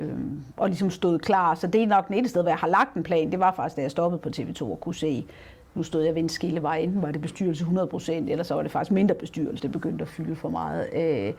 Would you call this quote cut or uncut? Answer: cut